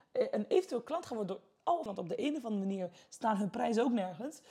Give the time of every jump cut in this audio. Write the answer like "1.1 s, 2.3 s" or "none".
1.9 s